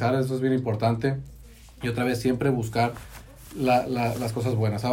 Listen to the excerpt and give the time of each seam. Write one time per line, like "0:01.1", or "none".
none